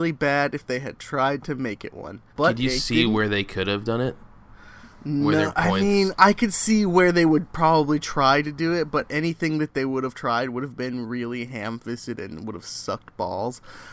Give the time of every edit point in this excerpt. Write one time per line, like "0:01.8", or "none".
0:02.3